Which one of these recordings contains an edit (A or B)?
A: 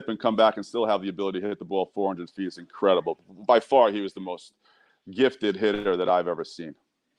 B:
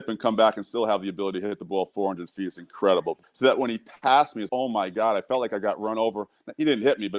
B